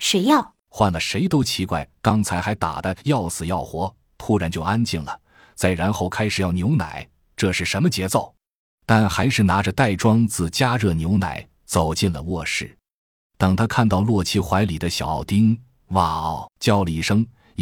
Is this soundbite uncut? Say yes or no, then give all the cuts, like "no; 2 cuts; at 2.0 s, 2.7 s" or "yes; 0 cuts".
yes; 0 cuts